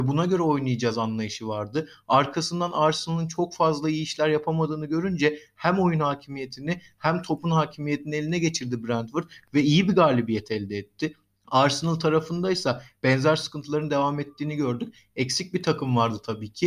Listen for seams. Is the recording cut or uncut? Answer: uncut